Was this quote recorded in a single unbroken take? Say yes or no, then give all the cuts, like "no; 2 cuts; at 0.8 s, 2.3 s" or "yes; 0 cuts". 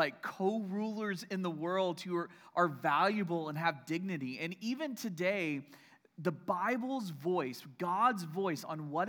yes; 0 cuts